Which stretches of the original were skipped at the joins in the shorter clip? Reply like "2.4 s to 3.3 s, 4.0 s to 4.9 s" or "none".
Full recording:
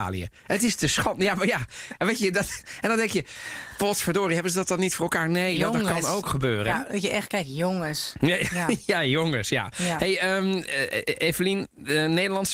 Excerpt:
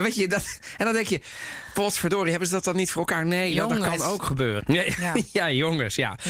6.6 s to 8.1 s